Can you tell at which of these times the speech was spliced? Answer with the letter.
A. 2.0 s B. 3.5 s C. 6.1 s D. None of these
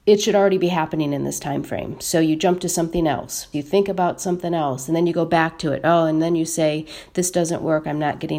B